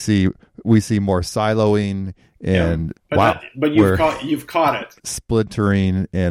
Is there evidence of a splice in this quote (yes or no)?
yes